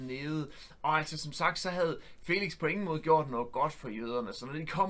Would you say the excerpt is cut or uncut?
uncut